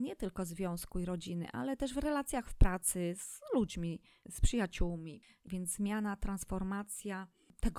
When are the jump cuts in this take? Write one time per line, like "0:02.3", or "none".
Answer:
none